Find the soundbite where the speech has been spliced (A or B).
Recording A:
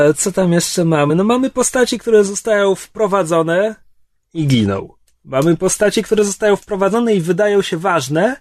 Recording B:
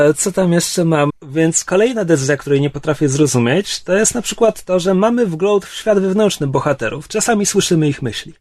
B